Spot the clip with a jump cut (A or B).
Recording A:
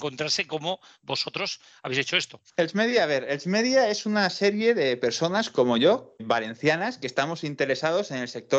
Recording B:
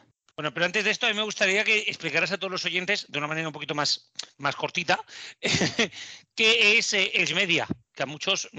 A